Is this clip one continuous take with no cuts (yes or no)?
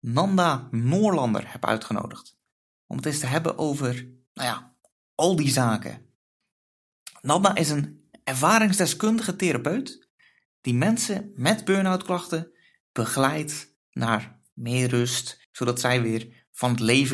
no